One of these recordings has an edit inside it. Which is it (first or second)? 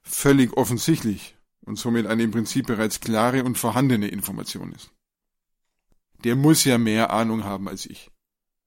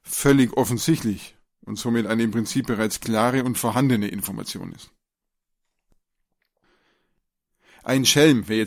first